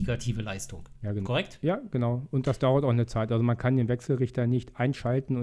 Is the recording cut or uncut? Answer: uncut